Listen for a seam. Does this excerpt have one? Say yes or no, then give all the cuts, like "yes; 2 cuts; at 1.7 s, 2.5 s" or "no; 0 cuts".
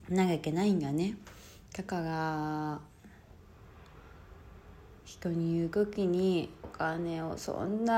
yes; 1 cut; at 6.6 s